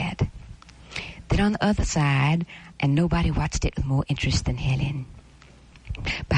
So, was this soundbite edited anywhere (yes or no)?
yes